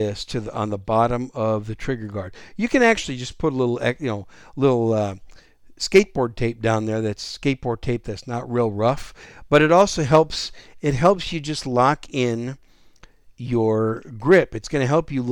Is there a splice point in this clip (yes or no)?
no